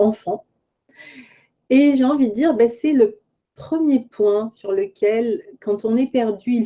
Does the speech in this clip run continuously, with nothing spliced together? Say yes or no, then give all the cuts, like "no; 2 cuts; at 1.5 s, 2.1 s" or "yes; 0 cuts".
yes; 0 cuts